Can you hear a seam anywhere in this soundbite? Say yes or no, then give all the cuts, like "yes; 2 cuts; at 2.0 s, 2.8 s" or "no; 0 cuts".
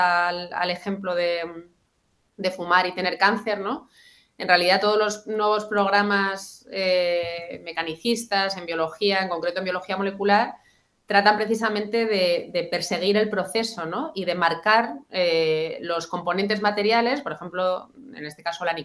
no; 0 cuts